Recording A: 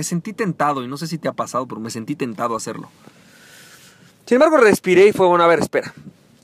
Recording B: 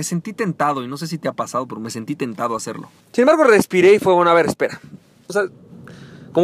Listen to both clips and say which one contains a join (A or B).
B